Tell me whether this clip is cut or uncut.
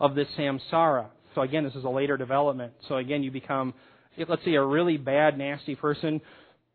cut